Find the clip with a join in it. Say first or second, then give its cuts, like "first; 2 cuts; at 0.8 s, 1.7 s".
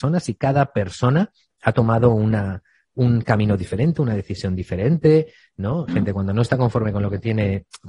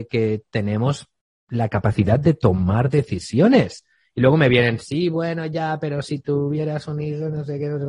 first; 1 cut; at 5.9 s